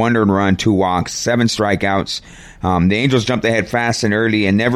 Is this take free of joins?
yes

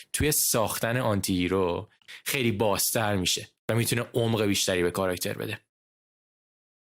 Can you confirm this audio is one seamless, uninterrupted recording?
yes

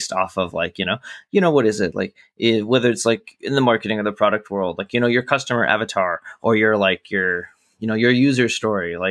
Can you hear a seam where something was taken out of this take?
no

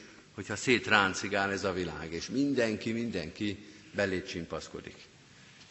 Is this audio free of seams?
yes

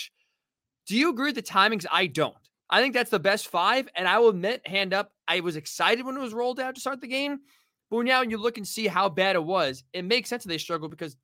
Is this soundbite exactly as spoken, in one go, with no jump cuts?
yes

